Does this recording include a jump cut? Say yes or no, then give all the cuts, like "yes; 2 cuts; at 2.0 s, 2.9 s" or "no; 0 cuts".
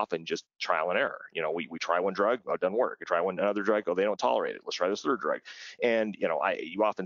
no; 0 cuts